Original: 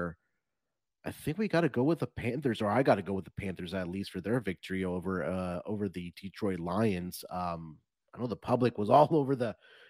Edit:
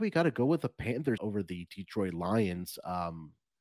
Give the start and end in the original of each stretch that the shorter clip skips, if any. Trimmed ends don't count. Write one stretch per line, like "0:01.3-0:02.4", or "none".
0:02.6-0:05.6